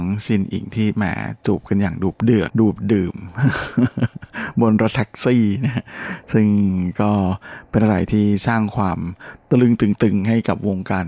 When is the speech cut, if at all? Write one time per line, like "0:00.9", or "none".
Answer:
0:02.5